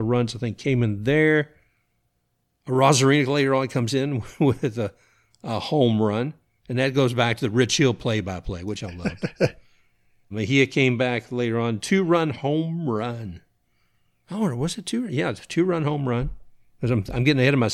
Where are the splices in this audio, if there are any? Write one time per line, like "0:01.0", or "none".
0:10.3